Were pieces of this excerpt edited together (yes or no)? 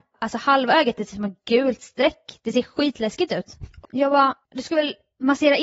yes